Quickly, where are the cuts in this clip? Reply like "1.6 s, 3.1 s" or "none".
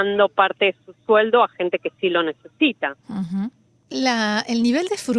3.9 s